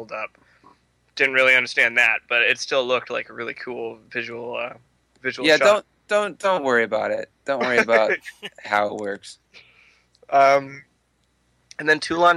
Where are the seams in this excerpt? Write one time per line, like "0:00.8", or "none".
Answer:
none